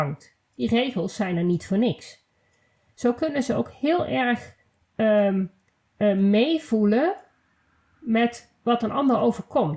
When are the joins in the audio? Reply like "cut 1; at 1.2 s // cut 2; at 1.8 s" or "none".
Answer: cut 1; at 2.9 s

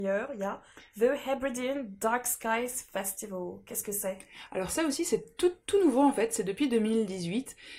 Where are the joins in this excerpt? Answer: none

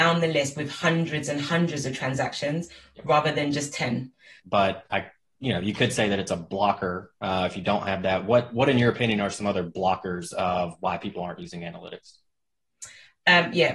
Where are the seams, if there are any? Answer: cut 1; at 4.4 s

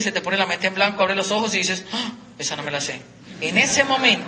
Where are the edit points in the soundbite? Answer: none

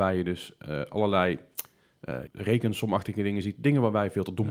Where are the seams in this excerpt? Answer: cut 1; at 2.3 s

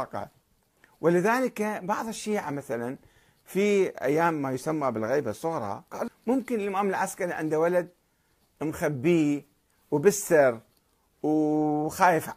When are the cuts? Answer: cut 1; at 6.1 s

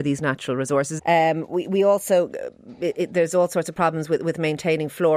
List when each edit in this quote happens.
cut 1; at 1.0 s

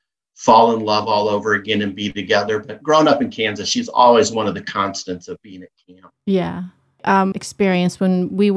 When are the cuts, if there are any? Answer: cut 1; at 7.3 s

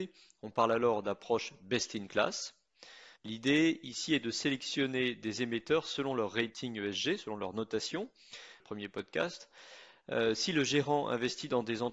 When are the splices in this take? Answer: cut 1; at 3.2 s // cut 2; at 8.6 s

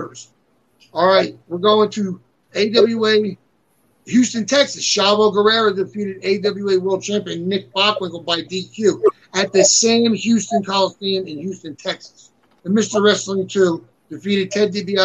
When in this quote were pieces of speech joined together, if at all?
cut 1; at 2.5 s // cut 2; at 12.6 s // cut 3; at 13.9 s

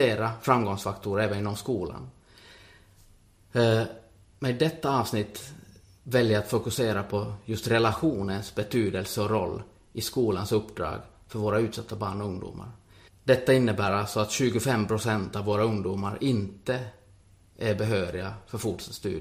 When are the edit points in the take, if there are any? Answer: cut 1; at 13.1 s

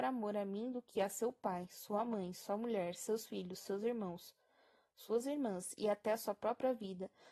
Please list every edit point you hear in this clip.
none

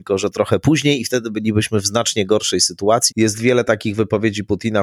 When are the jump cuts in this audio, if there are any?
cut 1; at 3.1 s

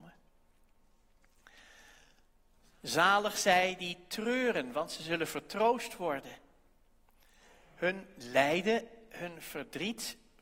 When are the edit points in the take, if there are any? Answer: cut 1; at 2.6 s

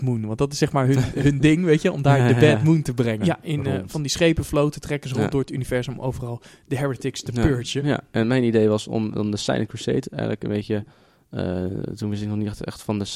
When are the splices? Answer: cut 1; at 3.2 s

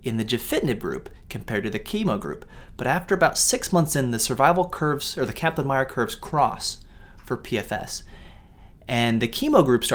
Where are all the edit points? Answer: none

